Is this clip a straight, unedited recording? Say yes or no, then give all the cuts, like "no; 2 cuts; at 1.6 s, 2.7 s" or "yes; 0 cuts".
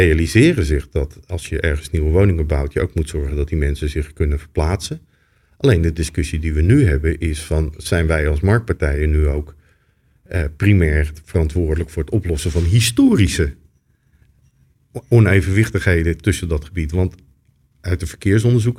yes; 0 cuts